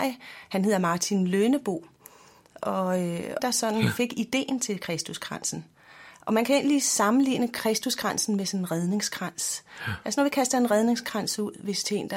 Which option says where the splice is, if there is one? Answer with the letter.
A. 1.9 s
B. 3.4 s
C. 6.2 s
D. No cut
B